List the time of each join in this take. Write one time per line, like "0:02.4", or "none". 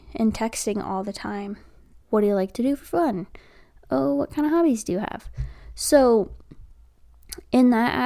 0:02.0